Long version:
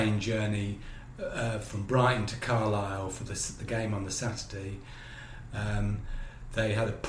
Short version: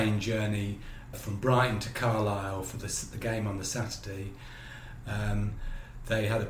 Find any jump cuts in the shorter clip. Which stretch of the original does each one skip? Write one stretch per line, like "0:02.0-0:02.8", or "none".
0:01.1-0:01.6

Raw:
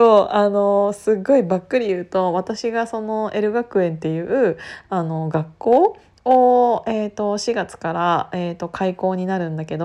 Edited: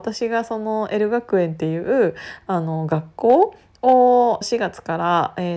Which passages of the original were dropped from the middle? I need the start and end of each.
0:06.8-0:07.4

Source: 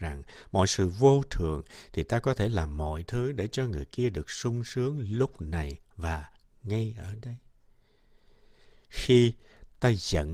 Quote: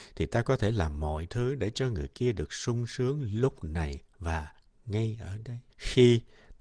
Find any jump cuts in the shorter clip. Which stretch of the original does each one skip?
0:07.5-0:08.8

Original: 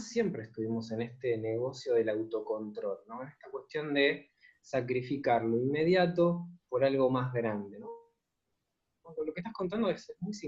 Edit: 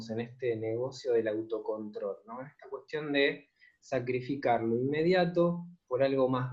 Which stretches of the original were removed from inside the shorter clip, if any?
none

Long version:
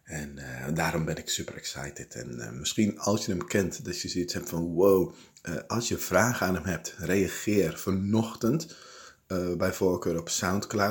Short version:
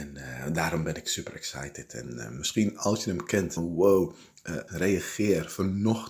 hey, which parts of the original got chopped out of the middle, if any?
0:03.8-0:04.6
0:05.7-0:07.0

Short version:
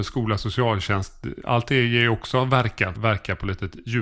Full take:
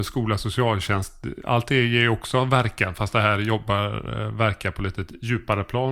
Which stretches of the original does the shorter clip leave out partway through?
0:02.9-0:04.3

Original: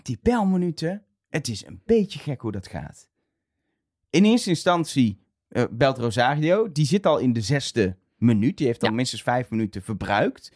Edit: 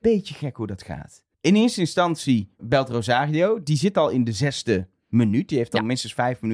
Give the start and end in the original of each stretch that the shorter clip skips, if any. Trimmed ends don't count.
0:03.2-0:04.0
0:05.3-0:05.7

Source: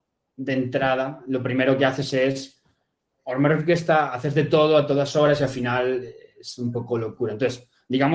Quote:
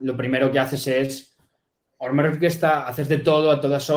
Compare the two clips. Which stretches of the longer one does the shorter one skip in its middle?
none

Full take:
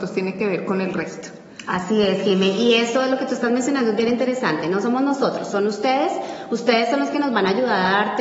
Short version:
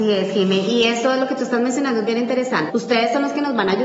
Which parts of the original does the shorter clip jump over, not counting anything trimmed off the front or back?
0:04.6-0:06.5

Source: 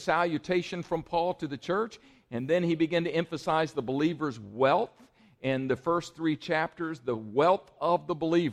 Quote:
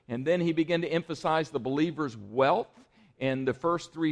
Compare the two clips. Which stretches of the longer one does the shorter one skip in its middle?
none

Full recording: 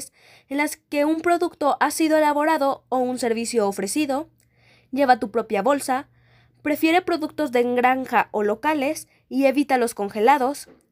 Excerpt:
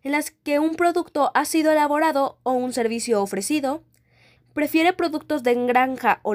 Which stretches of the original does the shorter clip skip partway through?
0:04.8-0:06.4

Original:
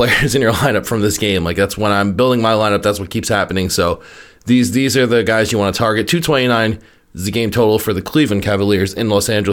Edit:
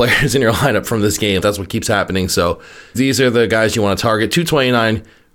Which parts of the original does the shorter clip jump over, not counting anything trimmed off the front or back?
0:01.4-0:02.8
0:04.4-0:04.7

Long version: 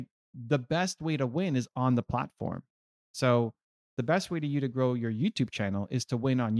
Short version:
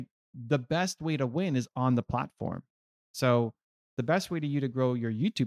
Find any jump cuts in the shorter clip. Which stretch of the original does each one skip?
none

